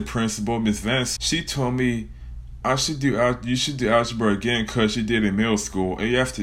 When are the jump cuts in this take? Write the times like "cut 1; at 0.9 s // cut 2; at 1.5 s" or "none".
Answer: cut 1; at 1.2 s